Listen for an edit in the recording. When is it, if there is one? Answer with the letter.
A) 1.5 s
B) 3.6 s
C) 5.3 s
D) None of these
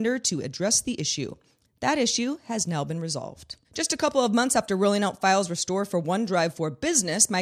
B